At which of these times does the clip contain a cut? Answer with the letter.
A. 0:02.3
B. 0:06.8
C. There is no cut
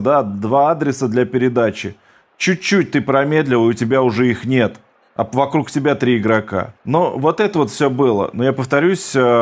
B